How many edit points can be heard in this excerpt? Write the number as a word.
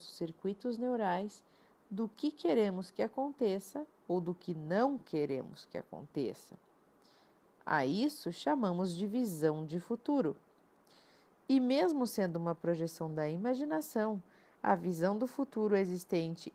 one